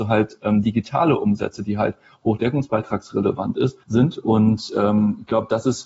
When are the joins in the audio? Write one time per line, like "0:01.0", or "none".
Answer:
0:03.8